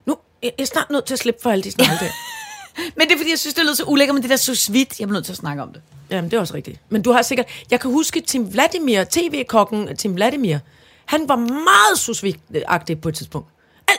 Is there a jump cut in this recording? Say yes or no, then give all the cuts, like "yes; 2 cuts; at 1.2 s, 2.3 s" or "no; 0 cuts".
no; 0 cuts